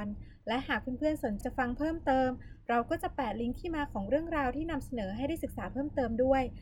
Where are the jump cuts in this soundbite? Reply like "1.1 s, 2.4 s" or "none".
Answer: 1.4 s